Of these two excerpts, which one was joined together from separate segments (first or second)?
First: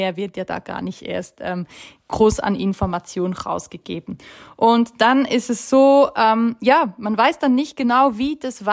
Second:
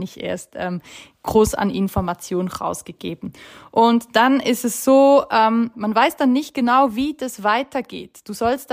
second